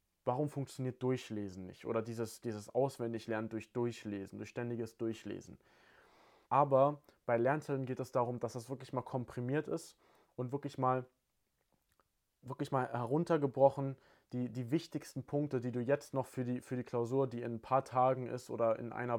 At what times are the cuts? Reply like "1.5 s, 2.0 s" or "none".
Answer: 6.4 s